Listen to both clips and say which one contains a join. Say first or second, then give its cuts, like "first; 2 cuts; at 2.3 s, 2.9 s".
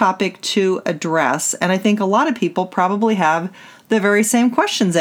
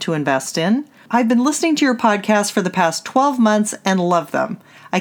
second; 1 cut; at 1.1 s